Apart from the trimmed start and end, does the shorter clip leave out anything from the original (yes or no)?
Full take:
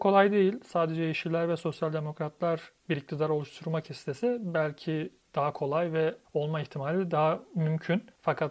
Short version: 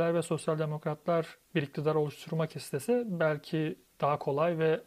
no